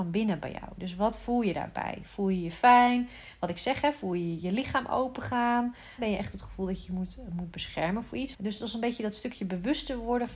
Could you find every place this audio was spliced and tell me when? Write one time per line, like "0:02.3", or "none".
0:06.0
0:08.3